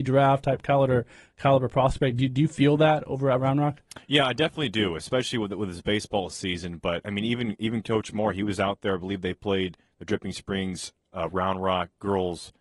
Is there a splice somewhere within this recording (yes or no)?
no